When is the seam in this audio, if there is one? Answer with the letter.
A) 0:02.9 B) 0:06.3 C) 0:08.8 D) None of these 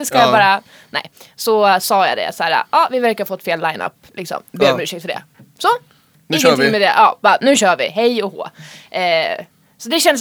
D